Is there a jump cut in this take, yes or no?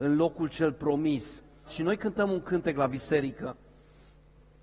yes